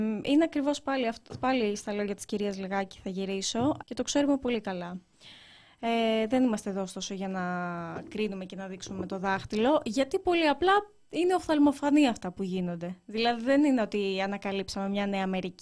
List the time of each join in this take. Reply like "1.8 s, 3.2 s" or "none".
3.8 s